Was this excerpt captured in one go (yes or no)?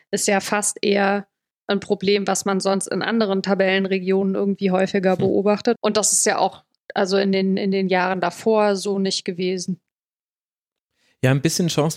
no